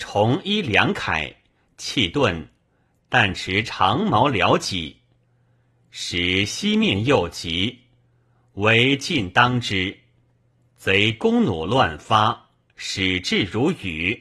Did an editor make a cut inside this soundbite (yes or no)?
no